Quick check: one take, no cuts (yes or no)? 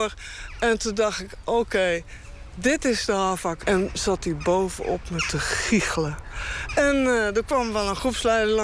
no